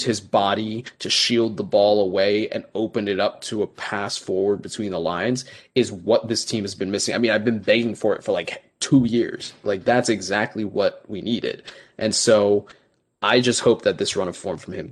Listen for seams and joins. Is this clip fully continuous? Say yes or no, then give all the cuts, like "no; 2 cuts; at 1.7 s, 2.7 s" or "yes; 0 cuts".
yes; 0 cuts